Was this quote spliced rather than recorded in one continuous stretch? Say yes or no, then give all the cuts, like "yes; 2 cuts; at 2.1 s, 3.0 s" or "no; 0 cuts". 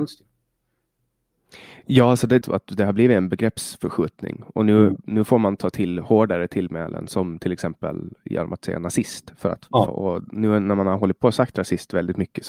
yes; 2 cuts; at 2.4 s, 9.9 s